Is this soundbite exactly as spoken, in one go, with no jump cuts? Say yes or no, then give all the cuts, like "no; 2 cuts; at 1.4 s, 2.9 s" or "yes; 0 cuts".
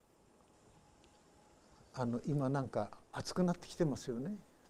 no; 1 cut; at 3.0 s